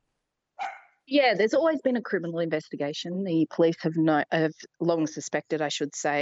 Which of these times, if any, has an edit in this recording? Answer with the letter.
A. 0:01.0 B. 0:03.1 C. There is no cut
C